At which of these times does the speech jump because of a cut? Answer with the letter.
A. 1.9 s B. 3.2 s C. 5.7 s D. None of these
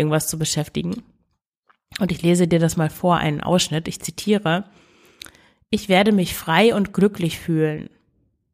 D